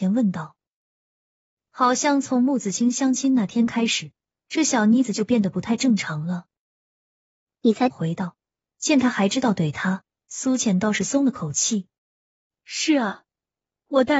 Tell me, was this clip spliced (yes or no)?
yes